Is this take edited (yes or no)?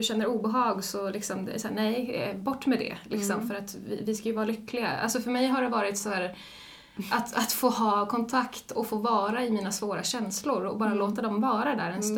no